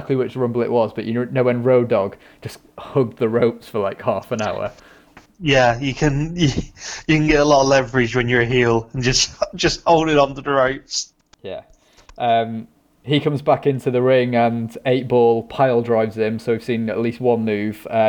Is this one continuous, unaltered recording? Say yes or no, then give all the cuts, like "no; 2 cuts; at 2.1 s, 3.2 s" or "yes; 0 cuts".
yes; 0 cuts